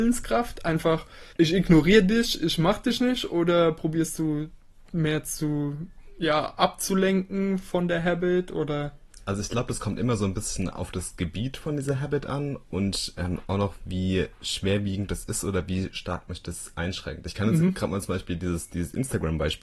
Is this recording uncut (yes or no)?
no